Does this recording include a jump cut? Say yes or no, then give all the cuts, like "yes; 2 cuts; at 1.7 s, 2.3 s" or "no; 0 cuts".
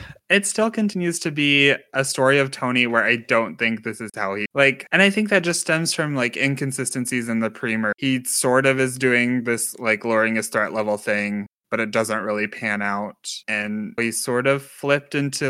yes; 1 cut; at 14.0 s